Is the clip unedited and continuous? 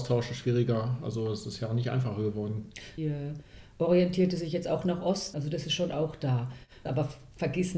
no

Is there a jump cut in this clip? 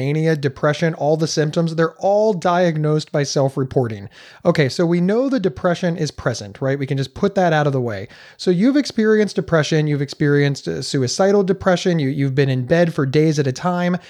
no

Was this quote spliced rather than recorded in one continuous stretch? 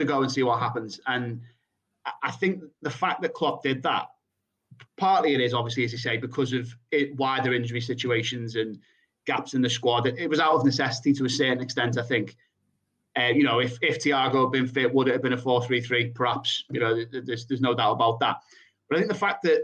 no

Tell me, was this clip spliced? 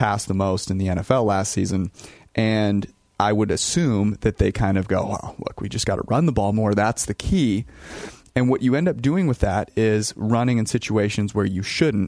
no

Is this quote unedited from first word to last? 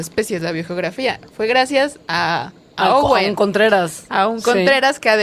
yes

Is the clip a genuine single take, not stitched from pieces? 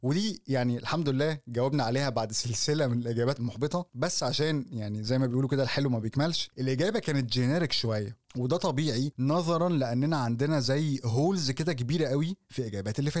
no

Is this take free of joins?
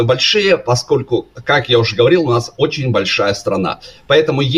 yes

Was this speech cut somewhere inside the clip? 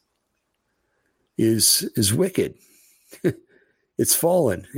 no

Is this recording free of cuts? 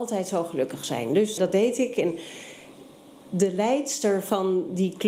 no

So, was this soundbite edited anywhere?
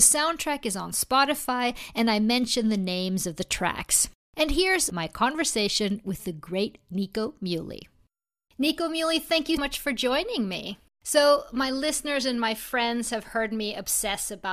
yes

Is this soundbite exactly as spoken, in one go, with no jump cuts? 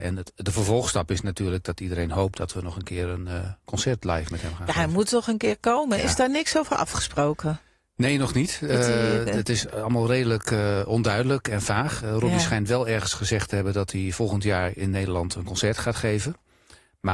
yes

